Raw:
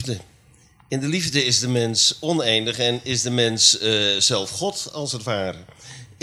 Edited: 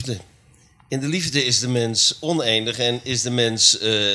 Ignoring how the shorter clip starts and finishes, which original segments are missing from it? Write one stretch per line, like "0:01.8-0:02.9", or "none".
none